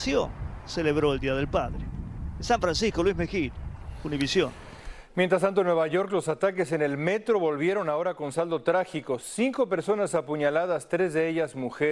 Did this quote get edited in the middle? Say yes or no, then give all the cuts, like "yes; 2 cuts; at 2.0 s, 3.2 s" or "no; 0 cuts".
no; 0 cuts